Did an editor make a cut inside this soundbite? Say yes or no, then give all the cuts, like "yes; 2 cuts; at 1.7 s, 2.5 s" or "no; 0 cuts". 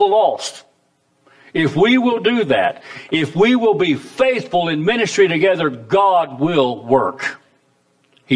no; 0 cuts